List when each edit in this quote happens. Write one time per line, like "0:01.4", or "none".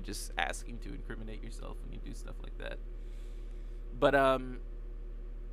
none

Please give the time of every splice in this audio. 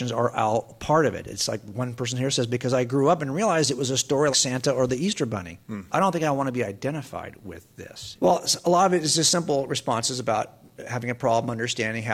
0:04.3
0:08.2

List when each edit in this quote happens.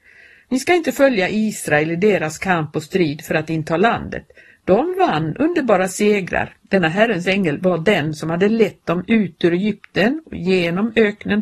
0:06.6

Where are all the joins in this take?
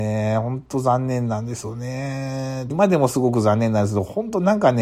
0:02.7

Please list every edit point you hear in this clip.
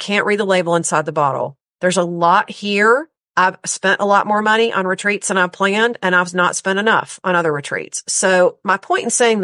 0:03.2

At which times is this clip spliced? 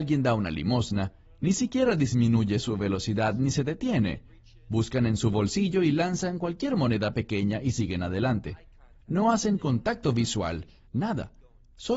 0:10.9

